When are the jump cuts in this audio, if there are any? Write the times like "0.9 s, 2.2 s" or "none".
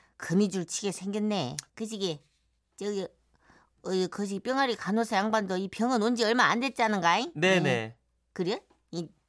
1.7 s